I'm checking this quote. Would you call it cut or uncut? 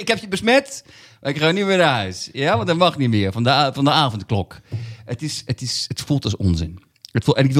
uncut